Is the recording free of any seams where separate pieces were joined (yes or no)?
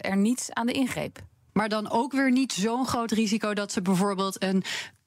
no